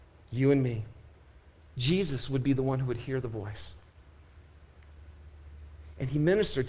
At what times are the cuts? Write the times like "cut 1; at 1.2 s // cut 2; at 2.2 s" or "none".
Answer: cut 1; at 1.6 s